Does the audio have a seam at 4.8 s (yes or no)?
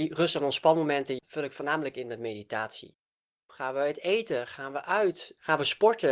no